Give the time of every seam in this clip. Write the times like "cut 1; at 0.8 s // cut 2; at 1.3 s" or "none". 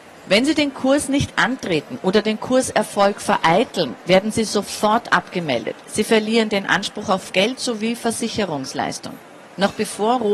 cut 1; at 9.4 s